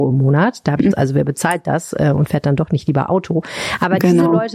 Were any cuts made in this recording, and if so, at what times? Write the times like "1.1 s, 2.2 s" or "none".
0.9 s